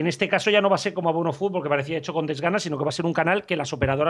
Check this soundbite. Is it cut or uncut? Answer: uncut